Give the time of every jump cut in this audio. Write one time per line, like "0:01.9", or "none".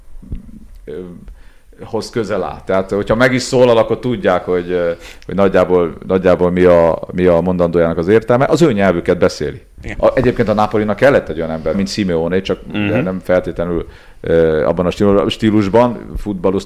0:09.9
0:11.7